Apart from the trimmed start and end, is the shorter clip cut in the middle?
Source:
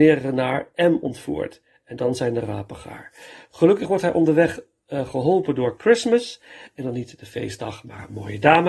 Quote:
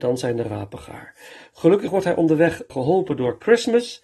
yes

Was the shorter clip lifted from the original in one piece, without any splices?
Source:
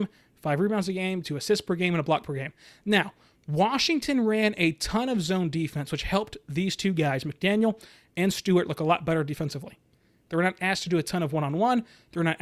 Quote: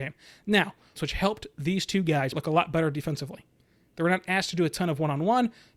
no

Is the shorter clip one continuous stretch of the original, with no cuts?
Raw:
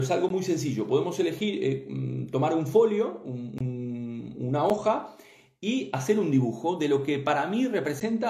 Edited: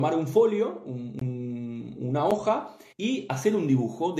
no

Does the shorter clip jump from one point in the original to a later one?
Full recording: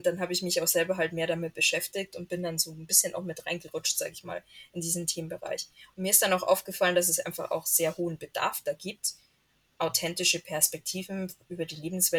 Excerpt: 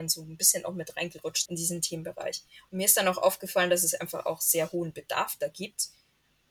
yes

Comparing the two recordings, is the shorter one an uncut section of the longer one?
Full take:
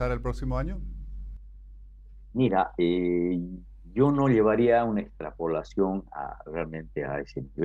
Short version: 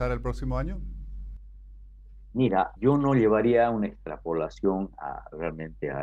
no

